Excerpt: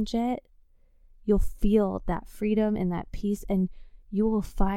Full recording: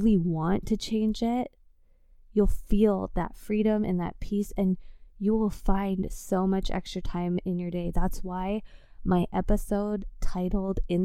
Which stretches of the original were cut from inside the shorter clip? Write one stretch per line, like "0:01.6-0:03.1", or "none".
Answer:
none